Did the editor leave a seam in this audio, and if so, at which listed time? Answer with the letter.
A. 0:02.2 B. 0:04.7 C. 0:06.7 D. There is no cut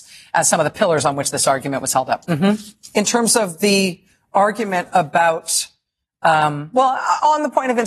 A